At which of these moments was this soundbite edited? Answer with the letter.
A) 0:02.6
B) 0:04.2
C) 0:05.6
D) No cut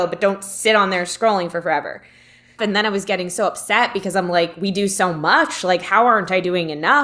A